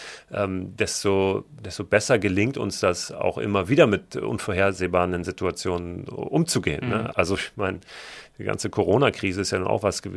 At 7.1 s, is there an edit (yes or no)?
yes